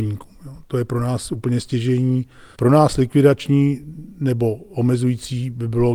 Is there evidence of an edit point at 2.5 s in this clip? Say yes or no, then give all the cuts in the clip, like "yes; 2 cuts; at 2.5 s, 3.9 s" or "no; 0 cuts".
yes; 1 cut; at 2.5 s